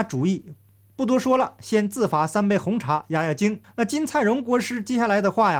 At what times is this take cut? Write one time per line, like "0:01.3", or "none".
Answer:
0:03.6